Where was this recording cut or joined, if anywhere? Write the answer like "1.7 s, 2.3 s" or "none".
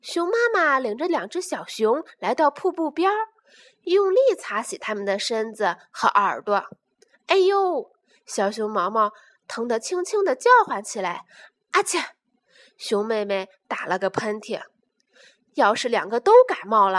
none